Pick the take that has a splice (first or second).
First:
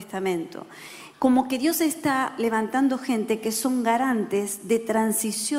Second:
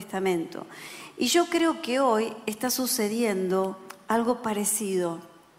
first